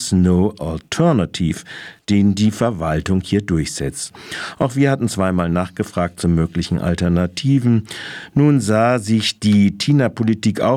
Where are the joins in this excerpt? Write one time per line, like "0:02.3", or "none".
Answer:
none